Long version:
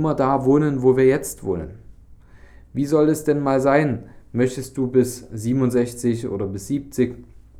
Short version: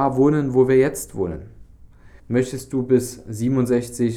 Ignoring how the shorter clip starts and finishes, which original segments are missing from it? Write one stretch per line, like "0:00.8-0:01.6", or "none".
0:02.5-0:04.2